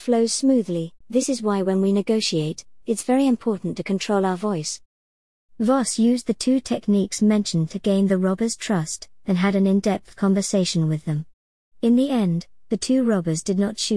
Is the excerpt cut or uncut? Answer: cut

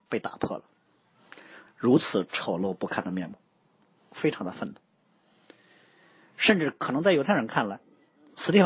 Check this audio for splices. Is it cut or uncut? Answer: cut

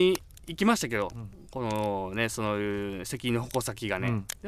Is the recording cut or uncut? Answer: uncut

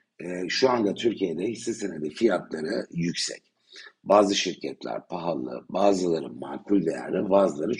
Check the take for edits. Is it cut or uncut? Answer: uncut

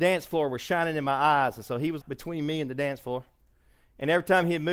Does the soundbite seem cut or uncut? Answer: cut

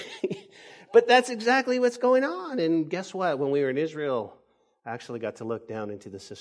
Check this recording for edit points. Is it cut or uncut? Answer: uncut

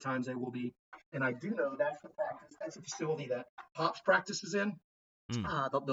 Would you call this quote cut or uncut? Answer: cut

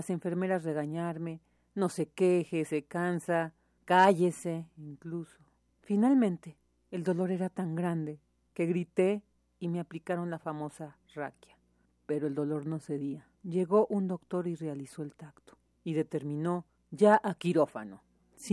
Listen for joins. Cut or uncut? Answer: cut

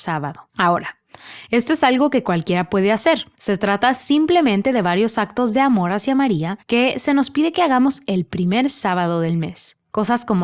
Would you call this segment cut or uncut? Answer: uncut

